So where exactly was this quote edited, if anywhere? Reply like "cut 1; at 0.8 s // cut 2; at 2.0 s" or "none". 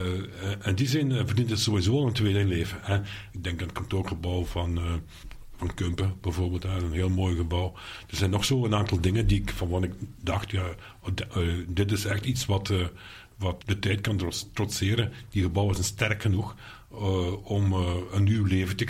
cut 1; at 3.3 s // cut 2; at 13.6 s